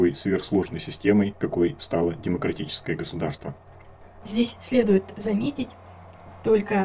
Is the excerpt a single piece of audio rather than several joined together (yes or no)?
no